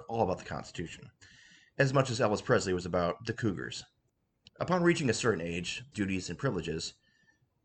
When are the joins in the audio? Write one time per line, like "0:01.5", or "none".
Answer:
0:04.5
0:05.9